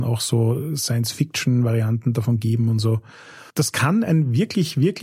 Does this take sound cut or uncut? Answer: cut